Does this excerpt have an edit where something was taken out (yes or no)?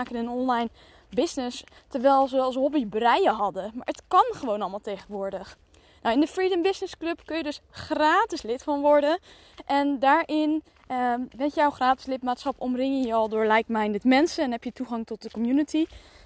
no